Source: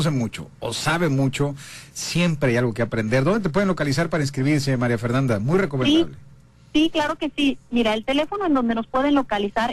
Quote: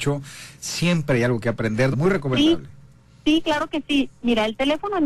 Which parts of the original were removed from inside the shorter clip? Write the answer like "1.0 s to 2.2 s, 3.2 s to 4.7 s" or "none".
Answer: 3.2 s to 5.4 s